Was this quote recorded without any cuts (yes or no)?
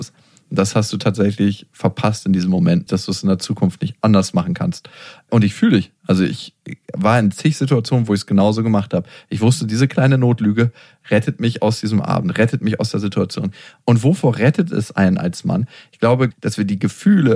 no